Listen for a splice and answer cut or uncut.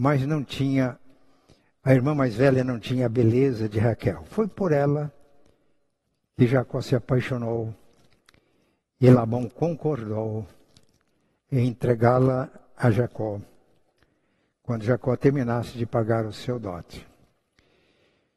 uncut